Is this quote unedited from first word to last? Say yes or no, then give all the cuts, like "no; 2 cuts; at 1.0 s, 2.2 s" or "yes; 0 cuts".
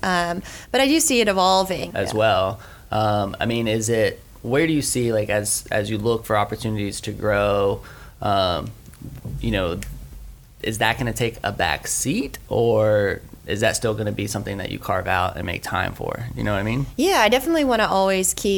no; 1 cut; at 1.9 s